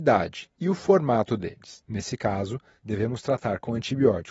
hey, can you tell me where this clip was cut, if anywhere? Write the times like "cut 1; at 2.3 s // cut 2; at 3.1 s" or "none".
cut 1; at 1.8 s